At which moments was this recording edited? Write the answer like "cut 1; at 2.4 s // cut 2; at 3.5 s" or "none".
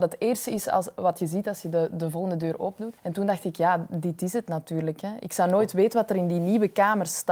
cut 1; at 3.0 s